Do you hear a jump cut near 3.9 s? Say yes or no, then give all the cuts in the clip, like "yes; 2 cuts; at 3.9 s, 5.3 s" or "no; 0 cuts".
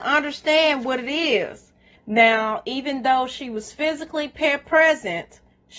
no; 1 cut; at 2.0 s